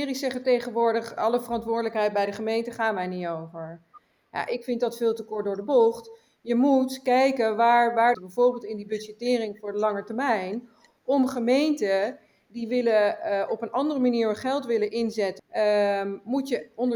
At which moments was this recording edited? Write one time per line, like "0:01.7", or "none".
0:08.1
0:15.4